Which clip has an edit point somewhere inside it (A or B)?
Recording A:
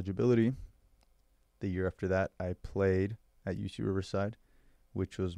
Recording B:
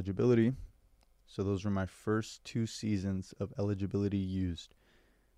B